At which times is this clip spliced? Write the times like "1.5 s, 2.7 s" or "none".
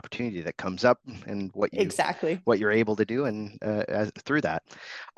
none